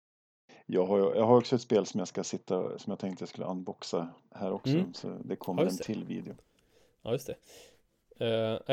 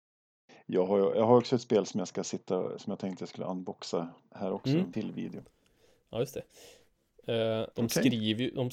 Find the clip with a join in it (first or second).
second